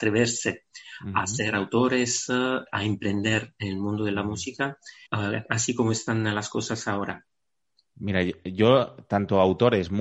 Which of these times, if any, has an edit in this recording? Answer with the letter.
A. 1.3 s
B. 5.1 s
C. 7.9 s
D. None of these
B